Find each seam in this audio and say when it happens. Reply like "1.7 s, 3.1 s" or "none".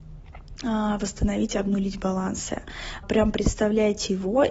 3.0 s